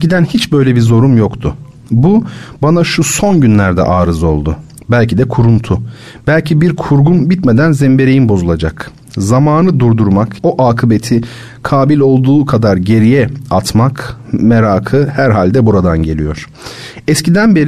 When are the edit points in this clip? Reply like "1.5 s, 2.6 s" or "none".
4.8 s, 10.4 s